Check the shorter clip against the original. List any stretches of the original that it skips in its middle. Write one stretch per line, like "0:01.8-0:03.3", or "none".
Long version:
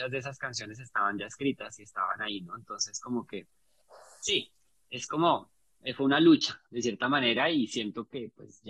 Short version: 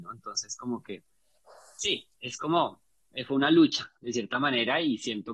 0:04.6-0:04.8